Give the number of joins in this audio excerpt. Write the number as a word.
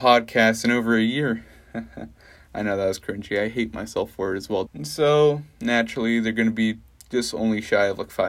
one